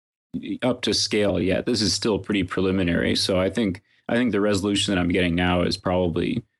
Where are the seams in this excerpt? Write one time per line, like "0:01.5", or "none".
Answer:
none